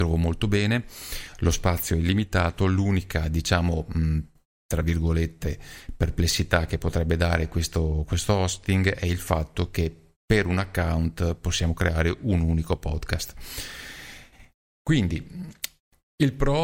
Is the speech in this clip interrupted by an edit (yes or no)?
no